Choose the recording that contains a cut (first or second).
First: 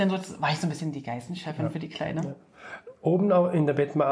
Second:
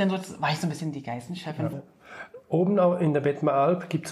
second